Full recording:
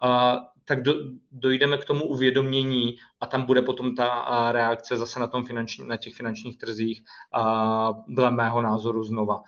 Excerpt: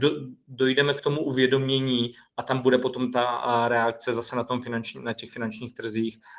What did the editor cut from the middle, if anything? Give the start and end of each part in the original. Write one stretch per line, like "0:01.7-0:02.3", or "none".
none